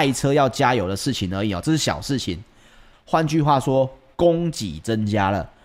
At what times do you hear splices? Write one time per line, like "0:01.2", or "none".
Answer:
0:02.9

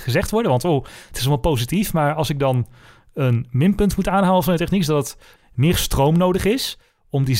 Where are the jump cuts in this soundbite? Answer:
0:05.4

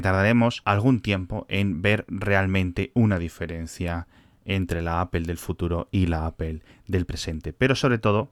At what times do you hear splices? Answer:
none

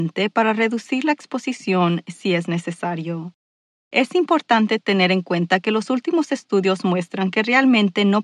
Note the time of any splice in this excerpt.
none

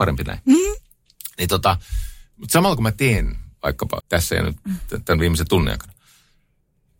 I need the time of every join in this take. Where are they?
0:04.0

